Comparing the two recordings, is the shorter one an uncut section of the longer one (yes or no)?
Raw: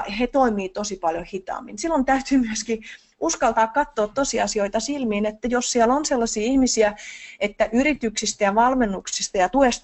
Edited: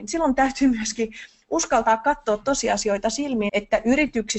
no